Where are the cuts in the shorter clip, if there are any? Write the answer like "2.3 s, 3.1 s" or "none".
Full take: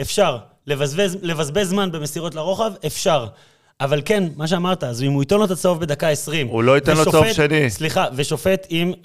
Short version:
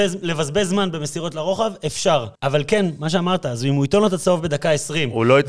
2.4 s